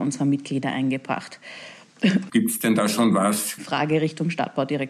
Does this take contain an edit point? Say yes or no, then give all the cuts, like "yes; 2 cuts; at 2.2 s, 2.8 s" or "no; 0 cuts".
yes; 2 cuts; at 2.3 s, 3.6 s